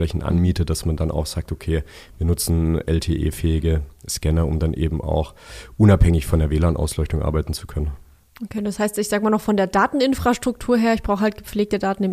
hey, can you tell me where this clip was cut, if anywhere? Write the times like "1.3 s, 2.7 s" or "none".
none

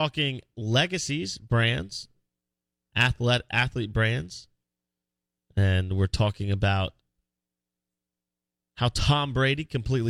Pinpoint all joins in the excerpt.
none

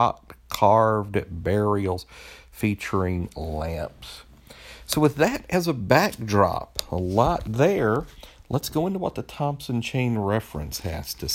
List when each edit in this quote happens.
none

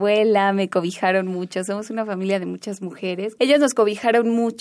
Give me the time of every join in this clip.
3.4 s

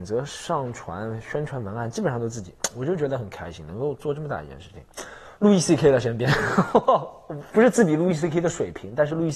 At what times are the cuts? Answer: 5.3 s, 7.5 s

